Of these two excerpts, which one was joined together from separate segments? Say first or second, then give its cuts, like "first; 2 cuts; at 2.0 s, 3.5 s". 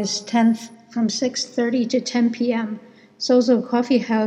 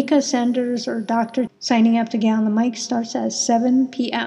second; 1 cut; at 1.5 s